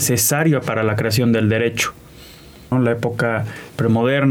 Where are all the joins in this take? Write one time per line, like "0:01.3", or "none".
0:02.7